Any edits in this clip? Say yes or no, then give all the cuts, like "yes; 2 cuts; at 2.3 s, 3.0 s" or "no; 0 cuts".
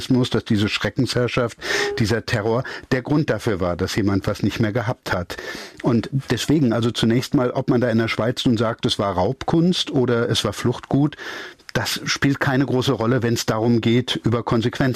no; 0 cuts